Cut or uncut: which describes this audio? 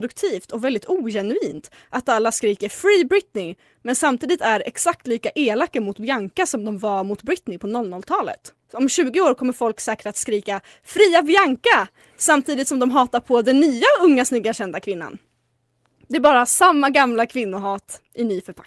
cut